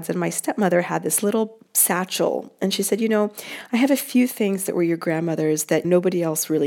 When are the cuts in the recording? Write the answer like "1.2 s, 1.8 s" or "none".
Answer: 2.6 s